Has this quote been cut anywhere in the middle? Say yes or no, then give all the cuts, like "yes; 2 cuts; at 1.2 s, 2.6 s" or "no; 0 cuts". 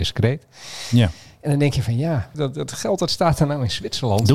yes; 1 cut; at 2.3 s